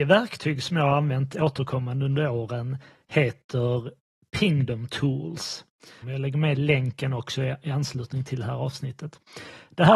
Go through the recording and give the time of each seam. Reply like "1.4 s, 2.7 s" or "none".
6.0 s

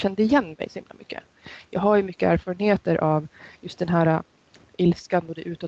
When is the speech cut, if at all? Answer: none

